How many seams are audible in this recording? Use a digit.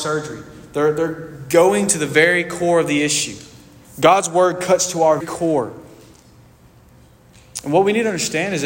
1